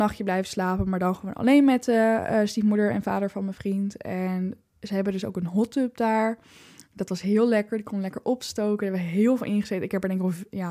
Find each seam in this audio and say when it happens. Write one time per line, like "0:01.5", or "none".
none

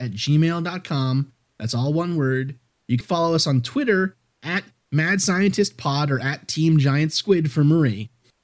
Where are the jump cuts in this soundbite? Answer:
0:03.0

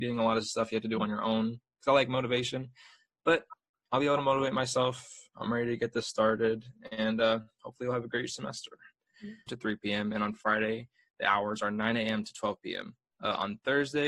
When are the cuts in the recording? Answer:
0:09.5

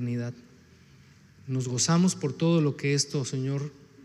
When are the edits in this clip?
none

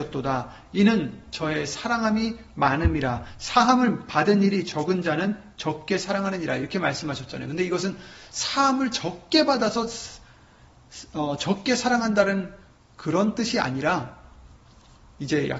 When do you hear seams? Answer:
none

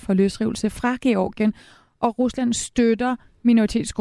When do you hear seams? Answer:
none

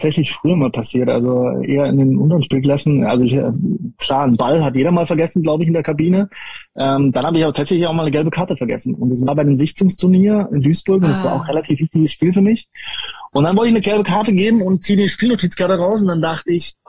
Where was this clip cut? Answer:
none

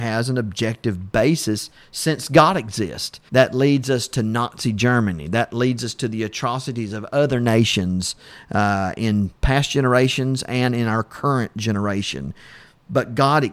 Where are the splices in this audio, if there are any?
0:03.3

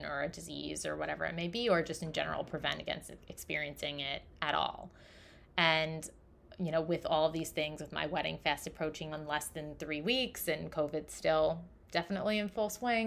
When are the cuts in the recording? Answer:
0:09.1

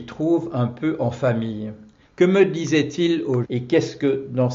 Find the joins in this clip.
0:02.0
0:03.4

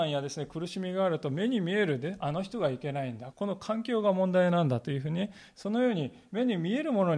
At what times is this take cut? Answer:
0:03.3

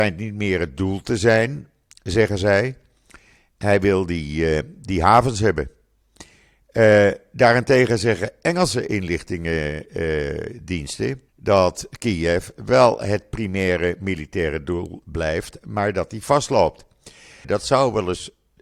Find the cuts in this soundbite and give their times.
0:11.3
0:17.4

